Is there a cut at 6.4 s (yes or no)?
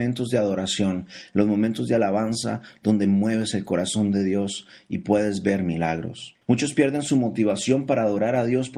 yes